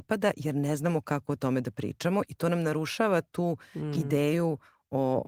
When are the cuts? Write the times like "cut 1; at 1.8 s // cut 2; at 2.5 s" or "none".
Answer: none

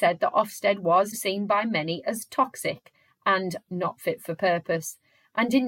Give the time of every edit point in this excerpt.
cut 1; at 1.1 s

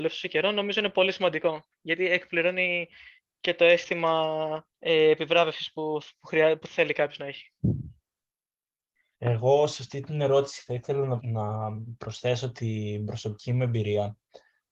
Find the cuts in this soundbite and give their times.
cut 1; at 4.7 s // cut 2; at 9.1 s // cut 3; at 11.2 s

